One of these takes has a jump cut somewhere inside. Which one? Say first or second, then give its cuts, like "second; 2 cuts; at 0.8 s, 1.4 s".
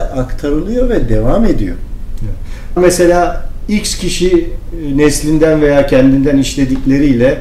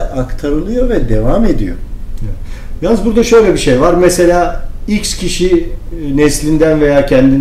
first; 1 cut; at 2.8 s